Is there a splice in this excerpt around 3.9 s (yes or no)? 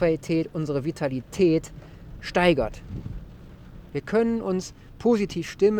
yes